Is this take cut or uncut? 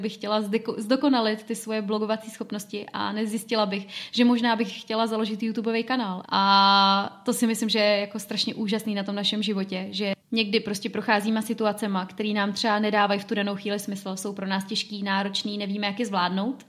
cut